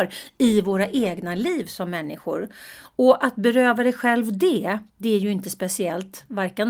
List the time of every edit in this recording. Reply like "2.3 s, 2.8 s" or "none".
4.9 s